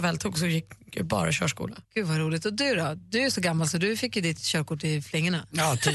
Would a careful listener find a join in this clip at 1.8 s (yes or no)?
yes